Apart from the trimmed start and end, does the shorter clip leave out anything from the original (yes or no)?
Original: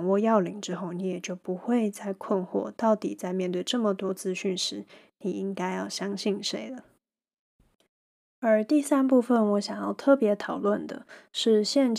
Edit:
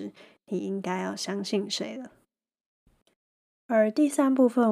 no